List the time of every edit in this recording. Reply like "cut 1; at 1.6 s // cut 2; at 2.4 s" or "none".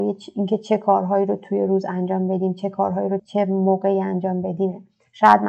cut 1; at 3.2 s

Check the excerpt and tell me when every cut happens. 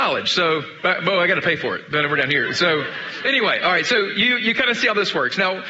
none

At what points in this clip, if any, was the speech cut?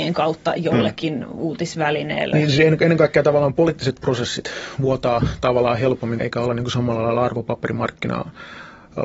cut 1; at 2.3 s // cut 2; at 6.2 s

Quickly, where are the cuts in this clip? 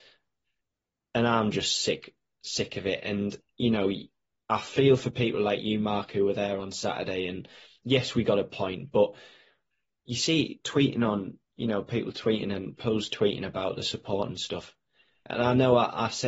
none

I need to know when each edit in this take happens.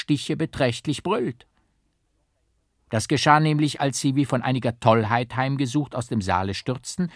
none

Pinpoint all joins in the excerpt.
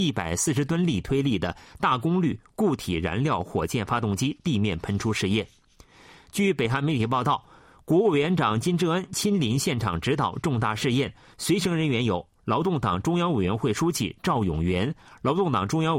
none

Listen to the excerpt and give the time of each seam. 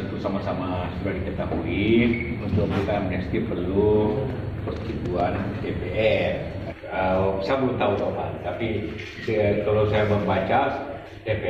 none

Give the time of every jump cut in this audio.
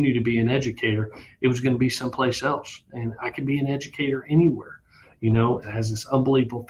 cut 1; at 5.6 s

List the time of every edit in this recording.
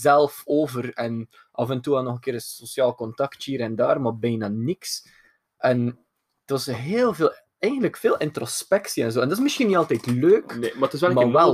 none

